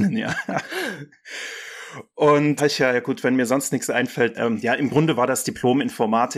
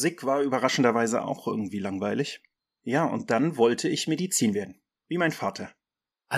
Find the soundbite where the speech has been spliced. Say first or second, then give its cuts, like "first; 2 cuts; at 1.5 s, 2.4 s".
first; 2 cuts; at 2.6 s, 4.3 s